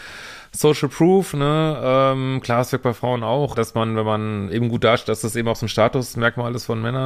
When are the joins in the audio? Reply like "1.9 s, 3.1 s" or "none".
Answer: 3.5 s